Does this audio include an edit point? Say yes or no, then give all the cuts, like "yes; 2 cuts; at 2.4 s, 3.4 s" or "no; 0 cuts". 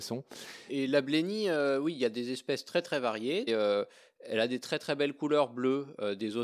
yes; 1 cut; at 3.5 s